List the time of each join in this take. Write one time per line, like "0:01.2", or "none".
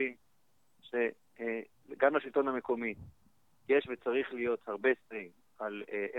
none